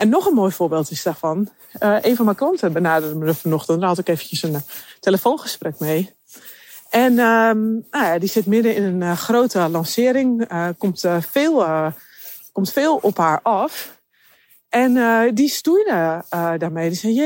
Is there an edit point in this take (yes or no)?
no